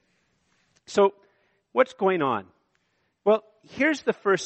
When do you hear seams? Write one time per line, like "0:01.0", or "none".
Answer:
none